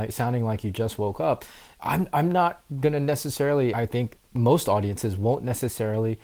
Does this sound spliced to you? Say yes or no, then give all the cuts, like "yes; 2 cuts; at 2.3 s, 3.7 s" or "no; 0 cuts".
yes; 1 cut; at 3.7 s